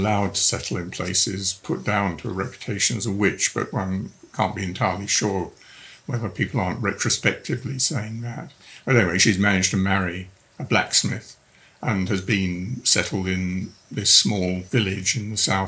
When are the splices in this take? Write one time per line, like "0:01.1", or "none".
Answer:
none